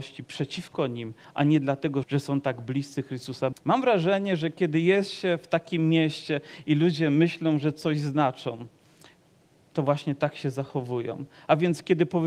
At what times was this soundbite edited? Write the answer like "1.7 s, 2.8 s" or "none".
2.0 s, 3.5 s